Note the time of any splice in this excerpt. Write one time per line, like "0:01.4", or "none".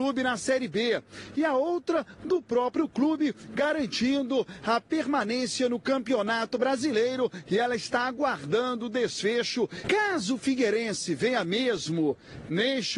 0:09.8